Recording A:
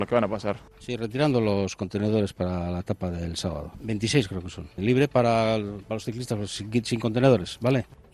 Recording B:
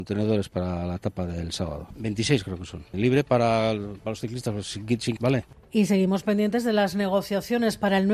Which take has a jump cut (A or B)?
B